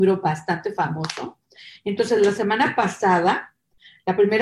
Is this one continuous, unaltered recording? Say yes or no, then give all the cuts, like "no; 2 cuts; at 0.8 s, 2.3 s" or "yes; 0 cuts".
yes; 0 cuts